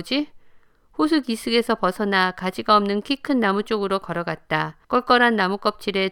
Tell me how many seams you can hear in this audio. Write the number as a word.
one